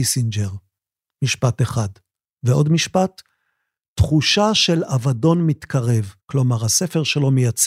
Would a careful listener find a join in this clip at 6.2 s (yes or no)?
yes